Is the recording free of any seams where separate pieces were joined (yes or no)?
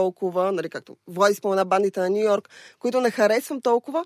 yes